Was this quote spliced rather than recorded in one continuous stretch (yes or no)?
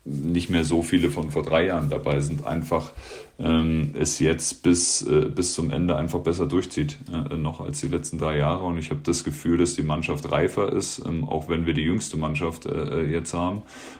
no